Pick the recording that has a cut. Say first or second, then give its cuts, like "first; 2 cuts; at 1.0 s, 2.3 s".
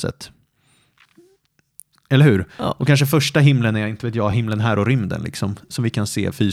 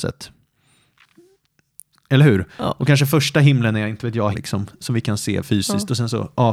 second; 1 cut; at 4.3 s